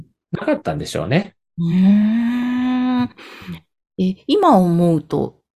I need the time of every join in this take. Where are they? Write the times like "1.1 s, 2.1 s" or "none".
none